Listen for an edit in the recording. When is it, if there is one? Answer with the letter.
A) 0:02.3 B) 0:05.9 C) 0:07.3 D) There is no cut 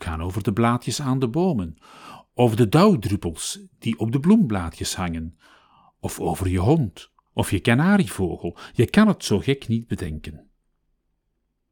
C